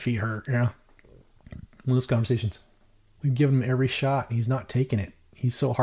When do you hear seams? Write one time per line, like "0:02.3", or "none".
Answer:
0:03.2

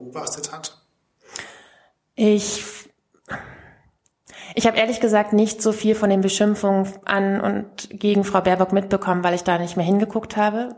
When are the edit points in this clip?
none

